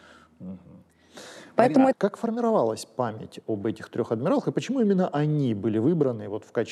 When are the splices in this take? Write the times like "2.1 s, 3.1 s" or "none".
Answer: 1.9 s